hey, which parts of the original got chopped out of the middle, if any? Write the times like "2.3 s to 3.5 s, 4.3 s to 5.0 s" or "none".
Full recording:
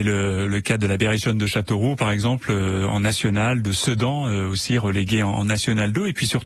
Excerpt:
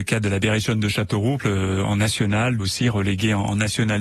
2.0 s to 2.4 s, 3.6 s to 4.5 s